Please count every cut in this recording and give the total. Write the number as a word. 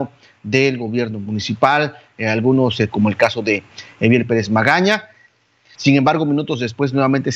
two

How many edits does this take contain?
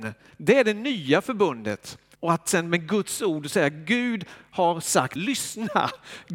two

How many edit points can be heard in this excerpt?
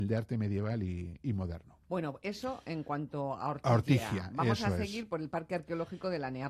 one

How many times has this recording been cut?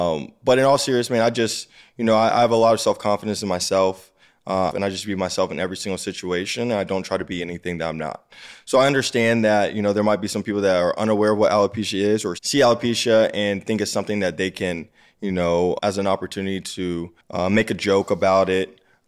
three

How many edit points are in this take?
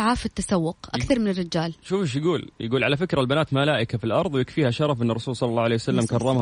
zero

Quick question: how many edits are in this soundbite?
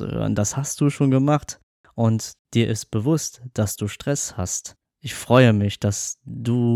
one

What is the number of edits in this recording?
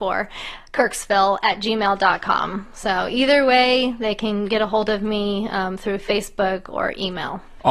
zero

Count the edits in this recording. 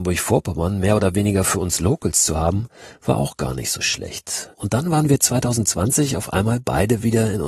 one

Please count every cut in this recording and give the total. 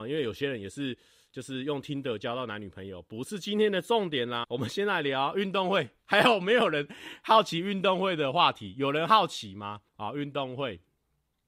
two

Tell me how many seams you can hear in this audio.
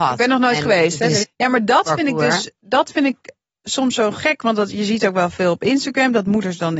one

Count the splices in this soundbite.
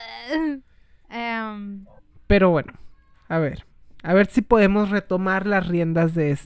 zero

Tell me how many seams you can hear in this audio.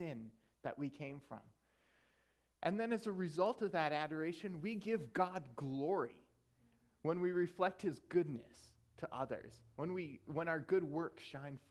one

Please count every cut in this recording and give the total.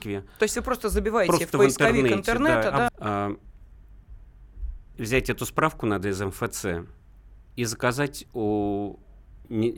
two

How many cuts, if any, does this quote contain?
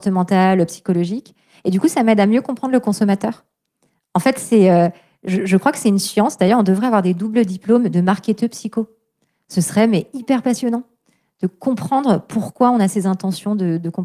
zero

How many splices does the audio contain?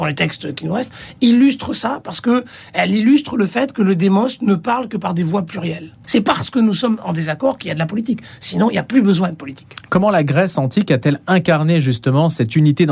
one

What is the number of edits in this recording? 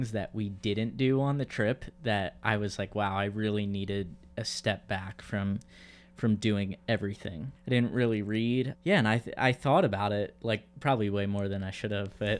two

